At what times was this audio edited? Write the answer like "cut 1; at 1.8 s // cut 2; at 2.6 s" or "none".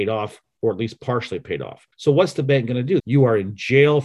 cut 1; at 1.9 s // cut 2; at 3.0 s